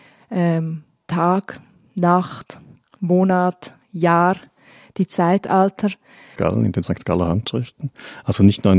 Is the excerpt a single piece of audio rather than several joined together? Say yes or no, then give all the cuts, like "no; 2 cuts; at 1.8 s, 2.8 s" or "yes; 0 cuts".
no; 2 cuts; at 1.0 s, 6.4 s